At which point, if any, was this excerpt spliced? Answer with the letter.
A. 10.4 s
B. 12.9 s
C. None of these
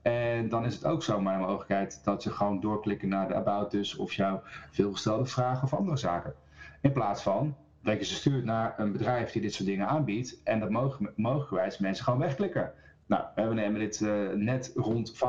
B